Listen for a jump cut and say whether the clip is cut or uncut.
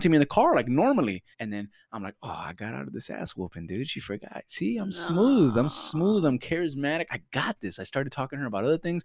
cut